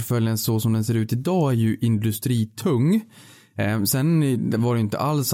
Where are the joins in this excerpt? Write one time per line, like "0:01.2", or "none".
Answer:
none